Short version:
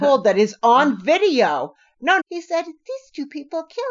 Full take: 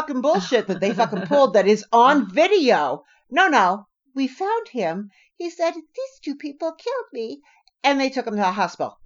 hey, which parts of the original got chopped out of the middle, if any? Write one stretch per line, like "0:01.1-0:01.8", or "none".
0:03.5-0:05.3

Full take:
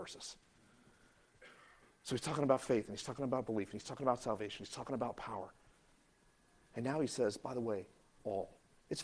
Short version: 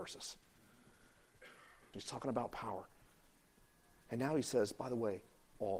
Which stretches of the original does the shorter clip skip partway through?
0:01.9-0:04.6

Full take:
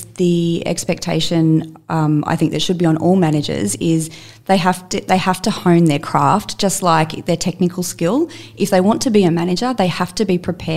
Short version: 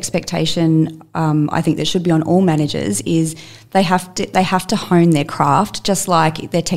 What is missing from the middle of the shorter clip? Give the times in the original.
none

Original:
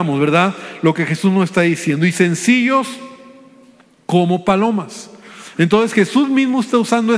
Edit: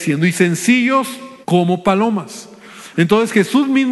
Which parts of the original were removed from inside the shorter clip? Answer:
0:03.2-0:04.0

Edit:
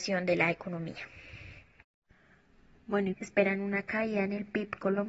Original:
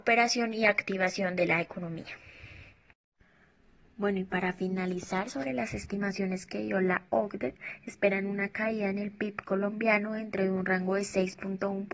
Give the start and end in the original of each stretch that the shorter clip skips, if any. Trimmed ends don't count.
0:04.2-0:07.8

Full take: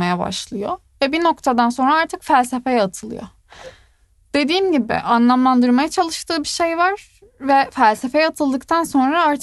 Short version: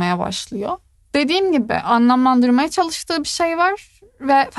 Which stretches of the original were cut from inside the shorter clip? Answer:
0:00.9-0:04.1

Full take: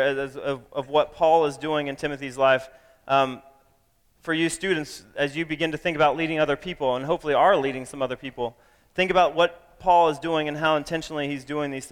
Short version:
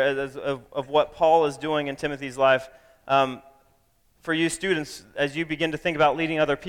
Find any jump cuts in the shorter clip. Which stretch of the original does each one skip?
none

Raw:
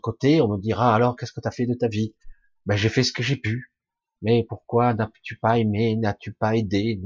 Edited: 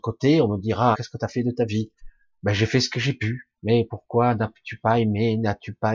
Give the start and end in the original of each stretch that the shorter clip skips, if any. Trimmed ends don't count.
0:00.9-0:01.2
0:03.8-0:04.1

